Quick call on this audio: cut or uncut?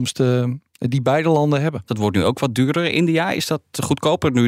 cut